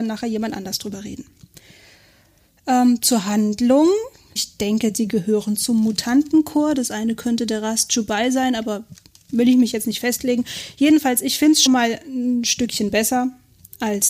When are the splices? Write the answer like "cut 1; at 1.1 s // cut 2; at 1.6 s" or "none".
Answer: cut 1; at 4.4 s // cut 2; at 11.7 s